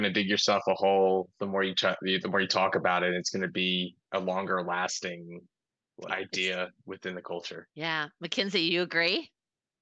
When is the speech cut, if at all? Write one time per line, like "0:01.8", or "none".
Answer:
0:06.1
0:07.7